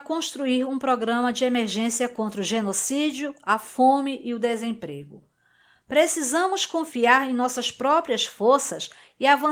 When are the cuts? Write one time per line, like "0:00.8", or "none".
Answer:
none